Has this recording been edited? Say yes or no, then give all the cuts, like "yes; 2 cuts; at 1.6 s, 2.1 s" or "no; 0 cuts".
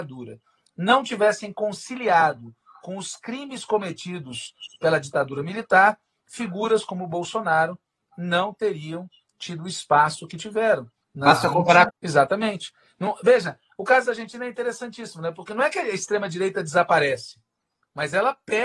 yes; 1 cut; at 11.9 s